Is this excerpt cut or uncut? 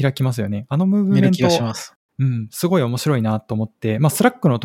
uncut